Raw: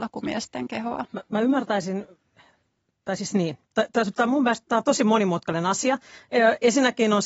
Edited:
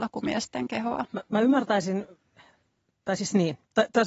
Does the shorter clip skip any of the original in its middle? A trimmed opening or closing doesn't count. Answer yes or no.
no